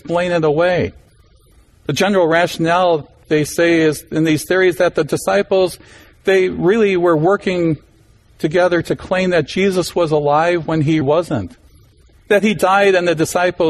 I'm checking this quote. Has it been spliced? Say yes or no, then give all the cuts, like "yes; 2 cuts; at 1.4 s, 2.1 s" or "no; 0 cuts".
yes; 1 cut; at 11.0 s